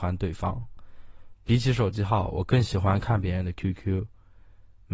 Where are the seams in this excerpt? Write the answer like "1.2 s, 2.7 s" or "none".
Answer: 1.3 s